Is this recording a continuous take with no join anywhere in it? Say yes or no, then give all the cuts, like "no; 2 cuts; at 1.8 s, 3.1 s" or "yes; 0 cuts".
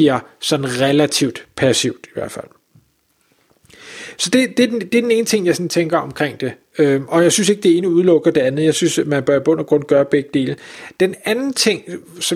yes; 0 cuts